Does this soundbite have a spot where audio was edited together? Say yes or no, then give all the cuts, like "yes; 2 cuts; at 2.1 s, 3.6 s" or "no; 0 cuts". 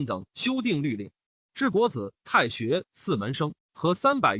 no; 0 cuts